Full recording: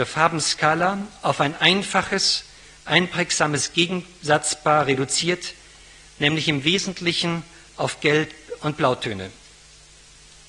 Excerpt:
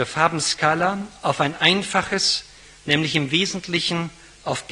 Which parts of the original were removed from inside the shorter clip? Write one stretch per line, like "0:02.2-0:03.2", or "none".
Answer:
0:02.8-0:06.1